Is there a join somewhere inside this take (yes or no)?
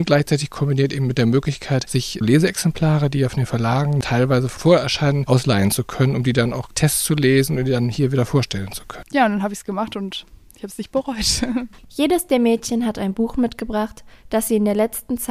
yes